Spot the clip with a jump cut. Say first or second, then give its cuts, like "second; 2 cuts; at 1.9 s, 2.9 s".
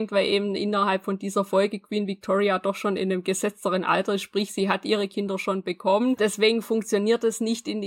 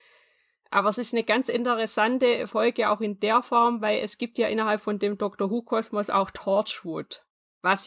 first; 1 cut; at 6.2 s